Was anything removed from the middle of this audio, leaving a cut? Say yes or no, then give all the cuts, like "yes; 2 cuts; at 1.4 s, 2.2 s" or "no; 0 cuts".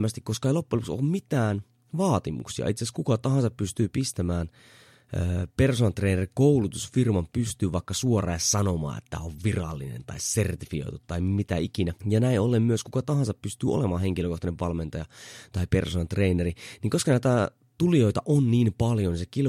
yes; 1 cut; at 12.0 s